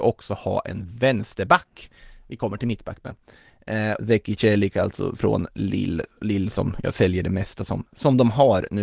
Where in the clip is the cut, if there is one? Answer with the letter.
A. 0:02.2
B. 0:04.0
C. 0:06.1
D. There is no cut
B